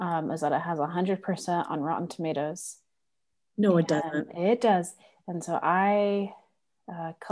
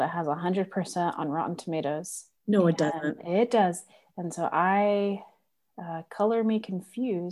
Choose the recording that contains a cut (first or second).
second